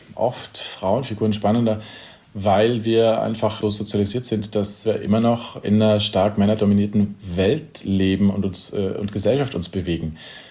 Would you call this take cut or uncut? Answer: uncut